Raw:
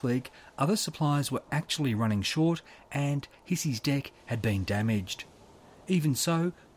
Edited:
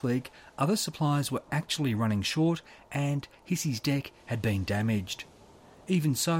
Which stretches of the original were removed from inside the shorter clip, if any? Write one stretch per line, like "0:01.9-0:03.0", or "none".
none